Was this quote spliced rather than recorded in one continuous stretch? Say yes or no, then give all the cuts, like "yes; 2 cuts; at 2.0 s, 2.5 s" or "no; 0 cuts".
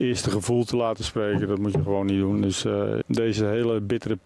yes; 1 cut; at 3.0 s